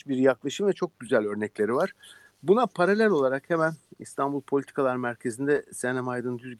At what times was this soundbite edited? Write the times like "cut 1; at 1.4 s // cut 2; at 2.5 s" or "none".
none